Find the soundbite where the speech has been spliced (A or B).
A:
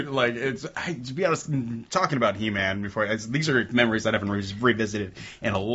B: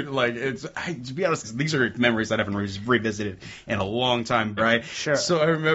B